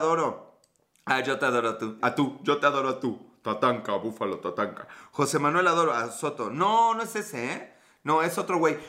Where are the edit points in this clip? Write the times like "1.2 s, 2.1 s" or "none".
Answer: 2.0 s